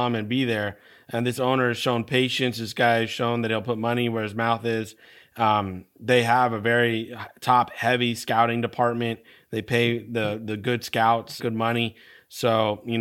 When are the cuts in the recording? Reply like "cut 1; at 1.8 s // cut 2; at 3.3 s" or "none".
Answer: cut 1; at 11.4 s